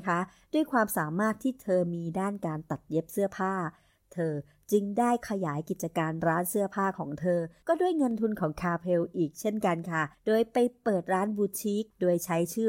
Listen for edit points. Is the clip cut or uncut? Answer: uncut